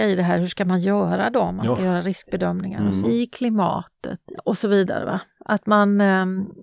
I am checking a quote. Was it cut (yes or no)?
yes